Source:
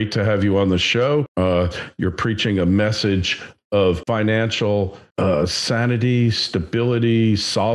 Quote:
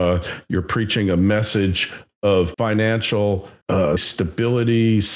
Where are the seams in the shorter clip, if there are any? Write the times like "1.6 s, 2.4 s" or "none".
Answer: 4.0 s